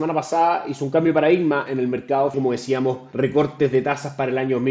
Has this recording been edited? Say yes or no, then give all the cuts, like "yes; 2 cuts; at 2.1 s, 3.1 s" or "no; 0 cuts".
yes; 1 cut; at 2.3 s